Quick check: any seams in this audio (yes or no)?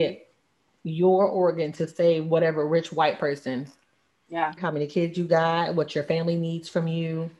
yes